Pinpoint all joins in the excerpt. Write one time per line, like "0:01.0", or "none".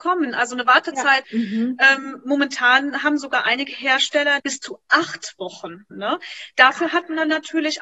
0:01.2
0:04.4
0:05.9

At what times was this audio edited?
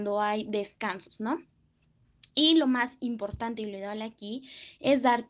none

